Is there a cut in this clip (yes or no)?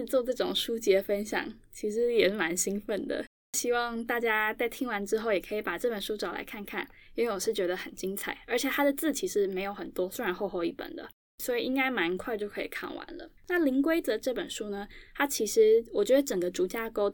yes